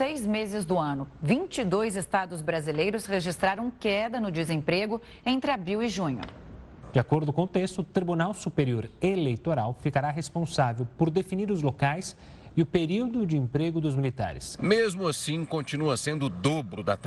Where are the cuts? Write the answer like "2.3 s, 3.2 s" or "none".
6.9 s, 14.6 s

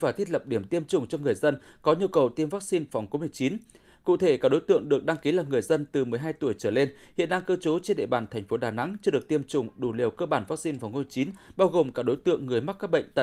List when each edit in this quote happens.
none

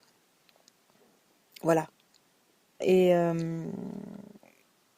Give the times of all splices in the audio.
2.8 s

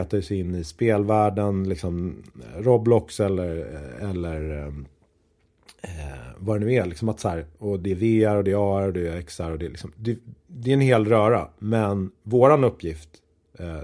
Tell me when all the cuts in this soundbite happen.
none

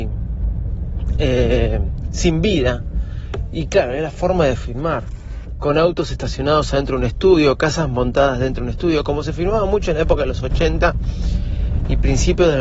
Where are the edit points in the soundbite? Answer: none

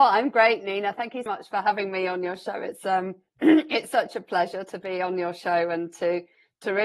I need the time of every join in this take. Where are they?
1.3 s

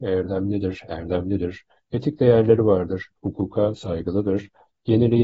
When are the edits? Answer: none

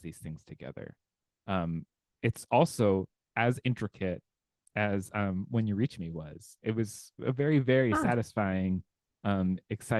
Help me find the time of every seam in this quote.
none

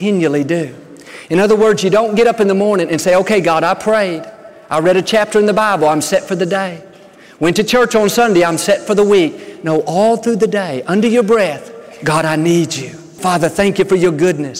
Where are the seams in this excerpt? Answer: 13.2 s

